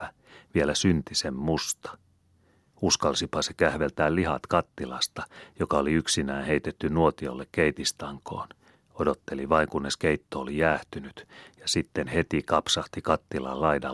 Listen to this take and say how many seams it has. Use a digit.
1